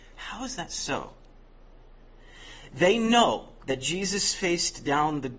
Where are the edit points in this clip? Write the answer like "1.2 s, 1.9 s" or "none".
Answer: 3.6 s